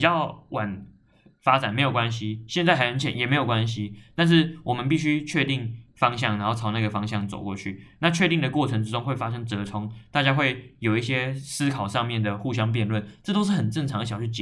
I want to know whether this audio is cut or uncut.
uncut